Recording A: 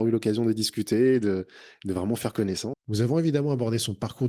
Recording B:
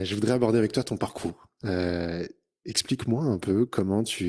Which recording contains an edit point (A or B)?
A